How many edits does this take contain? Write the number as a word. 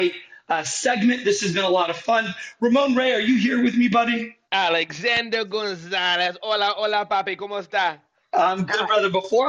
one